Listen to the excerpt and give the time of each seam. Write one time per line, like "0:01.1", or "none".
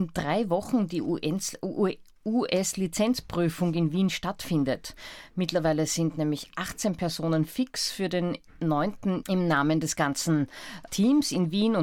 0:09.2
0:10.9